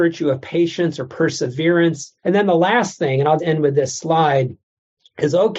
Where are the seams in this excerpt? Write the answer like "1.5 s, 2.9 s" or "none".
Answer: 2.2 s, 3.4 s

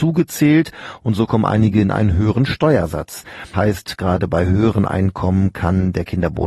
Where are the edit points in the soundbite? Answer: 3.5 s

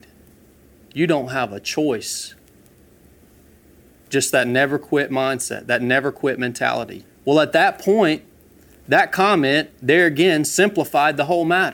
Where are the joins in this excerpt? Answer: 7.0 s

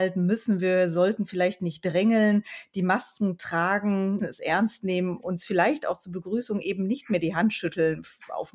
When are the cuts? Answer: 4.2 s

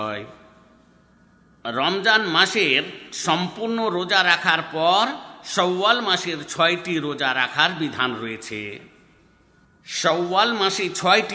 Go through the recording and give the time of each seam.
none

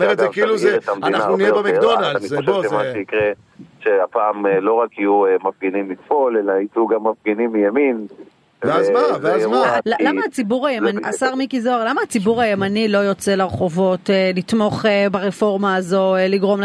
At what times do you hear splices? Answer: 9.8 s, 11.0 s

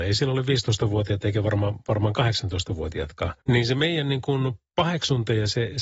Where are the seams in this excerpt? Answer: 3.4 s

